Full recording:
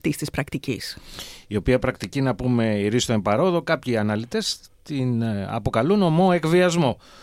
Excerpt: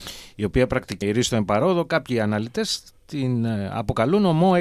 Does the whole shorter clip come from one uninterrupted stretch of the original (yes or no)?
no